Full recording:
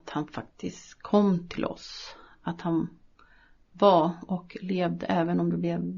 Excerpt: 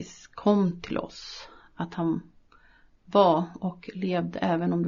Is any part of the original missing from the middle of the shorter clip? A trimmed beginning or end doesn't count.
no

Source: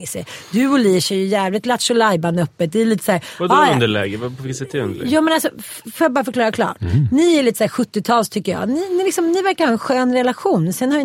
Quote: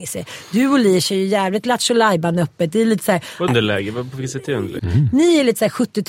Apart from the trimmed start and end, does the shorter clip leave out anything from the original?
yes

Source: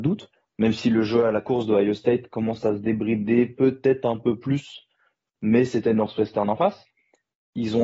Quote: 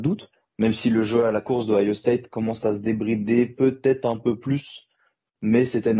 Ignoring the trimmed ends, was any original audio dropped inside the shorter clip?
no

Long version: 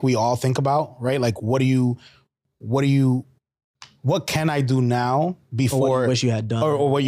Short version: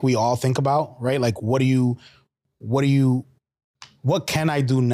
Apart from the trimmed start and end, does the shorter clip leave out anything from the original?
no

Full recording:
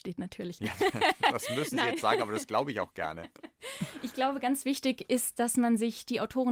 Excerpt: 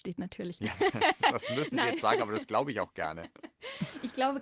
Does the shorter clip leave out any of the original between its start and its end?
no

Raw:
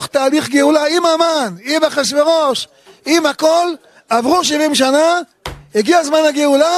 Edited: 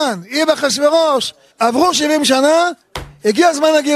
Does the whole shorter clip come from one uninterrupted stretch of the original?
no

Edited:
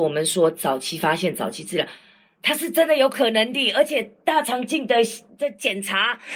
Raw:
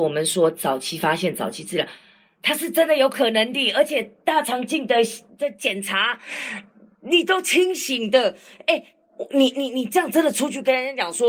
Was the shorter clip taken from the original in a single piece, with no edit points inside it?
yes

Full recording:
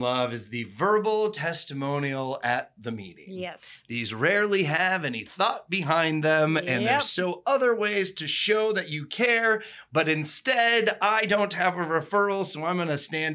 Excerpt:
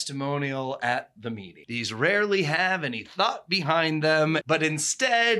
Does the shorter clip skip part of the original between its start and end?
yes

